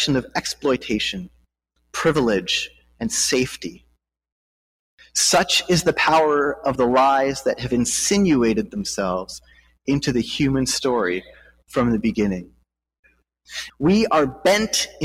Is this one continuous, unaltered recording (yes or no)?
no